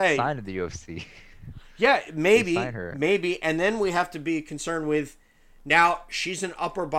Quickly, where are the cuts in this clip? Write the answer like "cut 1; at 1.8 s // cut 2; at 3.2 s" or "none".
none